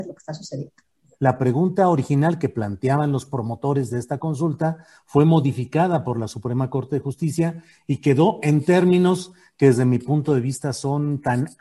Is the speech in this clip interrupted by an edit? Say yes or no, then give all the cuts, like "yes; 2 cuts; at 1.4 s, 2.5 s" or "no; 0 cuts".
yes; 1 cut; at 1.1 s